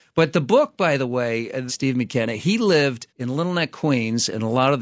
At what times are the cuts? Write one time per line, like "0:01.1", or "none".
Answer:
0:01.7
0:03.1